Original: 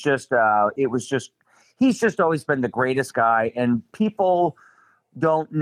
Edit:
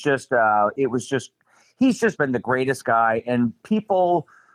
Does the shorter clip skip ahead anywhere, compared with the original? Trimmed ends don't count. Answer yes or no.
yes